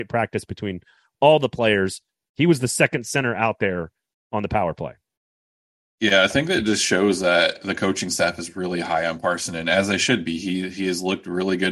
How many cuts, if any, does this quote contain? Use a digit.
0